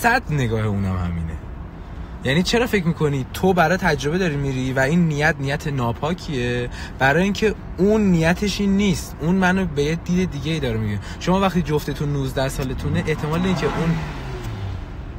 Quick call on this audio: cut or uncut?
uncut